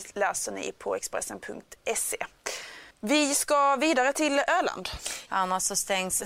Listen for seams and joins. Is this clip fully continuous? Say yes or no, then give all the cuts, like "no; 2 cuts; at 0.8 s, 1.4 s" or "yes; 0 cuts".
no; 2 cuts; at 2.9 s, 5.3 s